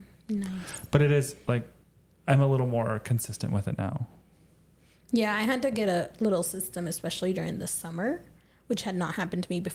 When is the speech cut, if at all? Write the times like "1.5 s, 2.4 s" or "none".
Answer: none

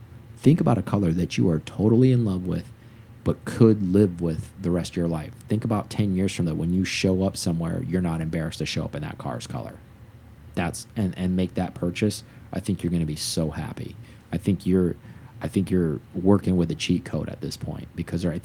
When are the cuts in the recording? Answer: 6.4 s

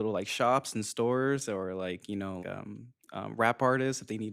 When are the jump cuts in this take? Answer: 2.4 s

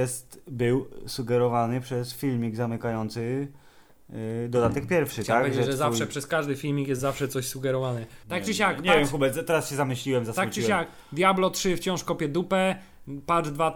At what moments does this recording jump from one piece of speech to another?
none

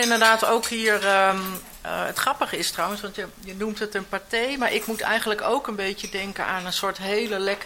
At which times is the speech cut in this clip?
none

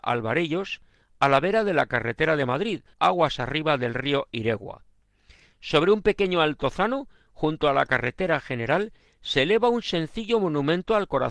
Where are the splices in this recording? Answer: 2.9 s

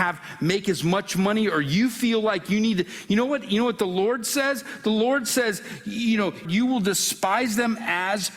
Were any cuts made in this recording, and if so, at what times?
6.4 s

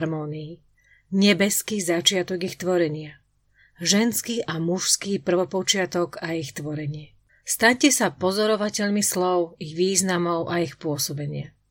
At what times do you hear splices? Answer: 7.3 s

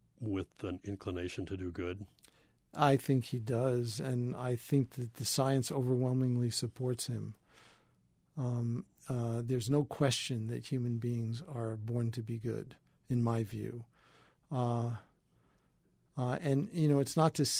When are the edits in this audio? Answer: none

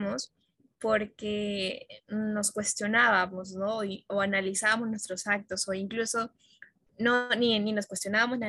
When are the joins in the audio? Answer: none

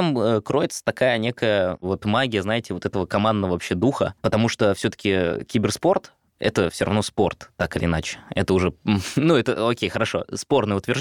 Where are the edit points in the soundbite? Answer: none

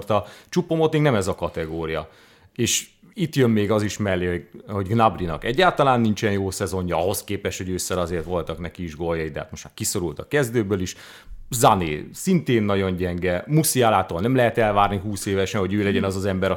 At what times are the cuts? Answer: none

